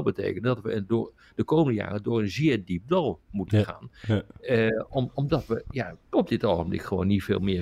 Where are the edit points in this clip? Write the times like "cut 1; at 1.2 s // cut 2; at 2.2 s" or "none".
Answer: cut 1; at 4.9 s // cut 2; at 6.0 s